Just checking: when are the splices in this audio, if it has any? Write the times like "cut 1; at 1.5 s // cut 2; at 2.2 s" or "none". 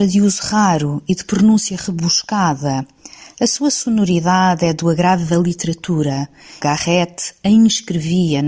cut 1; at 6.6 s